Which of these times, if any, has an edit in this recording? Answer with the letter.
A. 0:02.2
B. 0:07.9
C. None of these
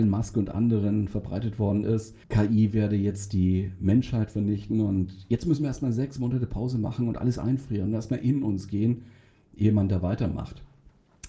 A